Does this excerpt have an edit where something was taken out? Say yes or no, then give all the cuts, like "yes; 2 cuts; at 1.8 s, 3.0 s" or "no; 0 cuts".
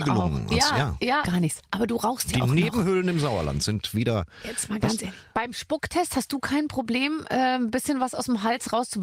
yes; 1 cut; at 1.2 s